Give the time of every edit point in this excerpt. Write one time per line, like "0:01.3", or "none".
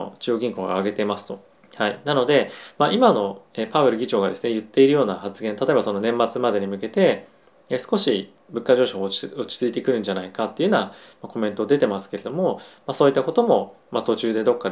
0:01.6